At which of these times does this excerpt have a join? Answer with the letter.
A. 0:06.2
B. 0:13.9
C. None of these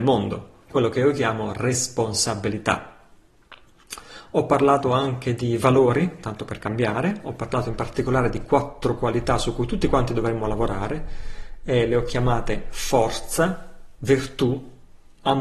C